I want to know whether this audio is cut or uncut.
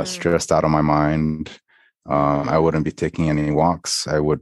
uncut